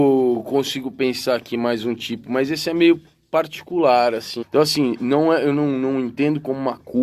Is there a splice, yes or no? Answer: yes